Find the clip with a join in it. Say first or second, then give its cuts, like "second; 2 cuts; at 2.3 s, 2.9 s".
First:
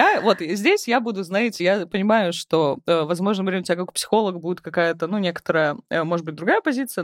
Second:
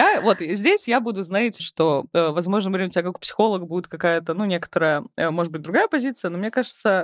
second; 1 cut; at 1.6 s